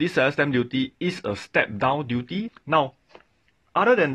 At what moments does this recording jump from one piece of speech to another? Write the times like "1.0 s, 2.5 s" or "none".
2.5 s

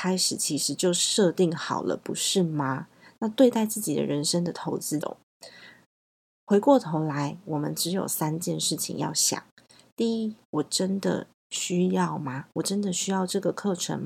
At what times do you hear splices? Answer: 5.0 s

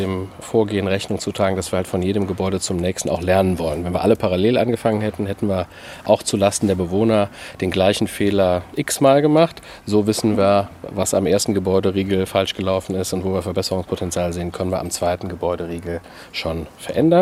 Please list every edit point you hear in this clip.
none

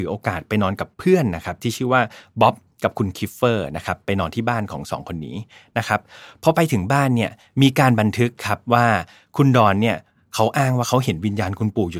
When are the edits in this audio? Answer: 0.9 s

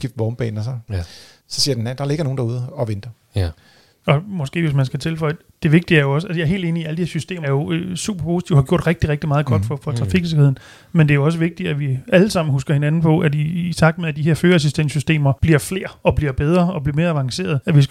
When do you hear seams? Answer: 7.4 s

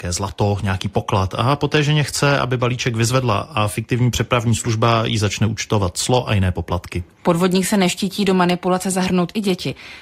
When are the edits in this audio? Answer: none

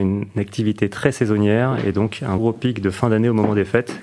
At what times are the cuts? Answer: 2.4 s

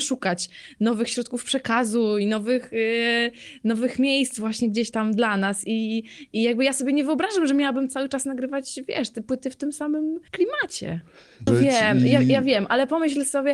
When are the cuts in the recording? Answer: 10.3 s, 11.5 s

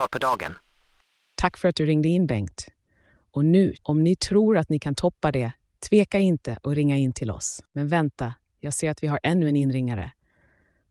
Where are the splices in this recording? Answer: 3.7 s

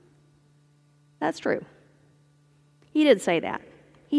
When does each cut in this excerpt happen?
none

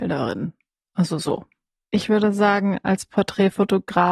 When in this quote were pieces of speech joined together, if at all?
1.8 s

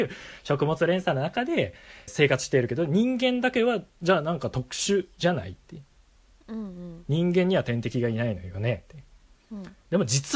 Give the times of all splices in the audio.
2.1 s

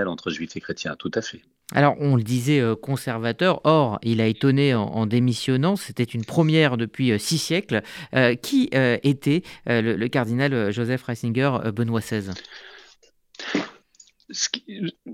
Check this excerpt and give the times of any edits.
none

